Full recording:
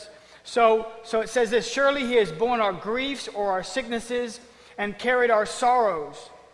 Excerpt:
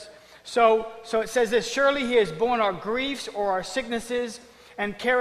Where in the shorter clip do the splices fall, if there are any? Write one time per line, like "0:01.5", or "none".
none